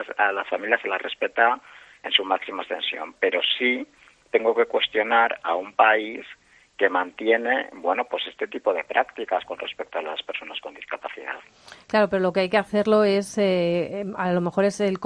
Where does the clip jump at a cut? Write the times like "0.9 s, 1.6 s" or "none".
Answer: none